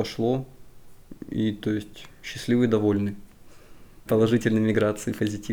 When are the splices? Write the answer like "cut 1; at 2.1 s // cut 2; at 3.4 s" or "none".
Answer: cut 1; at 4.1 s